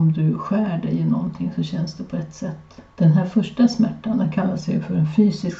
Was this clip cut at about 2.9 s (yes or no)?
yes